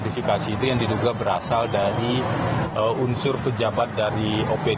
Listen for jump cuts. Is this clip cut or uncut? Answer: uncut